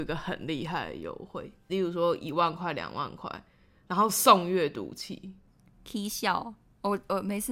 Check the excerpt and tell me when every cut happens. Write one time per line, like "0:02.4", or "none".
0:01.7